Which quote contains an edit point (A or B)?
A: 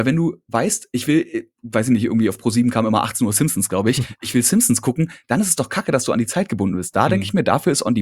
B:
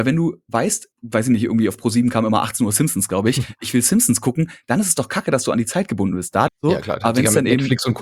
B